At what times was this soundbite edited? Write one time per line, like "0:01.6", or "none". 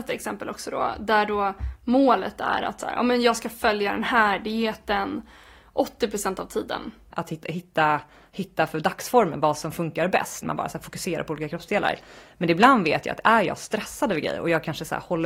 0:07.1
0:10.4